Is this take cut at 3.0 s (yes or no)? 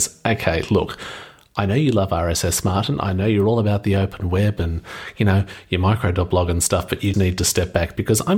no